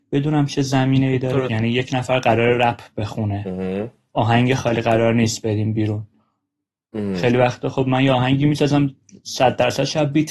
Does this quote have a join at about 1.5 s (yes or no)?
yes